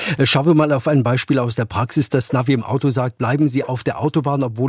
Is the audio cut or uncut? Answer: uncut